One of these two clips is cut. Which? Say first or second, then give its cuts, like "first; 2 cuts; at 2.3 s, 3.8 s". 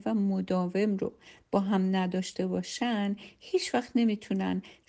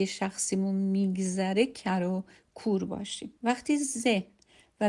second; 1 cut; at 3.4 s